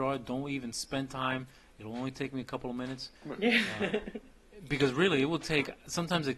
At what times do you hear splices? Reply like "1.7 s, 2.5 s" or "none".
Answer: 3.2 s